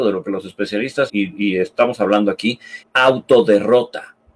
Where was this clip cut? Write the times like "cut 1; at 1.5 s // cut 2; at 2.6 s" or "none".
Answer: cut 1; at 1.1 s // cut 2; at 2.8 s